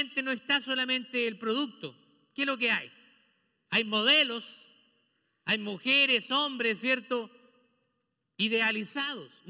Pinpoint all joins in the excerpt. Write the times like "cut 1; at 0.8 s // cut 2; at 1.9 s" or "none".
none